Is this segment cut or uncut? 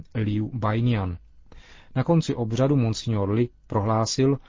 uncut